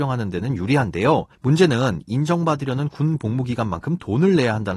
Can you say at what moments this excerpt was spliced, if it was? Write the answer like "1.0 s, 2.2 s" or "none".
1.3 s